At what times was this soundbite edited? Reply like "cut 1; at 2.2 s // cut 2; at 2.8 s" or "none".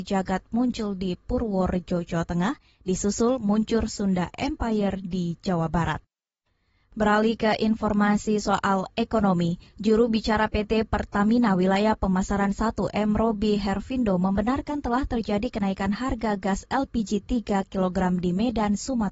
none